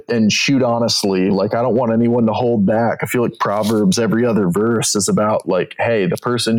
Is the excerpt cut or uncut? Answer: uncut